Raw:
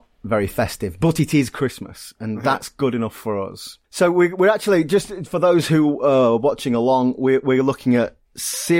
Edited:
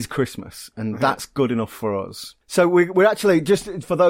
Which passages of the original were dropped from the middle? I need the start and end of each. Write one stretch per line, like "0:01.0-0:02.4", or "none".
none